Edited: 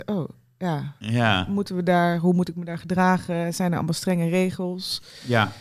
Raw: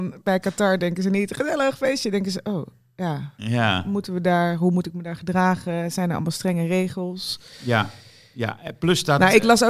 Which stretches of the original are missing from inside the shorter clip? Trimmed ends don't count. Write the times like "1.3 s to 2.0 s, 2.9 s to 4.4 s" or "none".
none